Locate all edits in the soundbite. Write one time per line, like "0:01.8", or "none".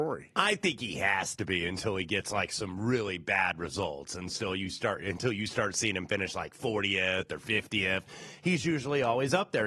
none